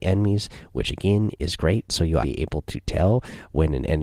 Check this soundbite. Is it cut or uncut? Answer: cut